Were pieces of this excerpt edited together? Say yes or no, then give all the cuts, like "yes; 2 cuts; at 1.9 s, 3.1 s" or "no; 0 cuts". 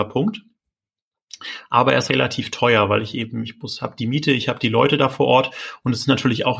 yes; 1 cut; at 2.1 s